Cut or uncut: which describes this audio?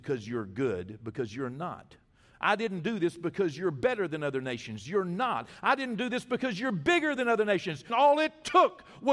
cut